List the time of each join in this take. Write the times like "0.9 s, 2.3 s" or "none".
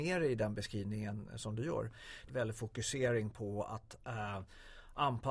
2.3 s